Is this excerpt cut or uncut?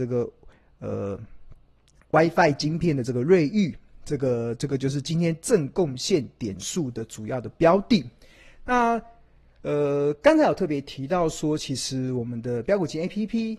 uncut